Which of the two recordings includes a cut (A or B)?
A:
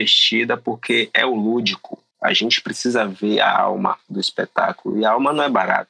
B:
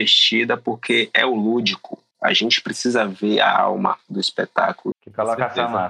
B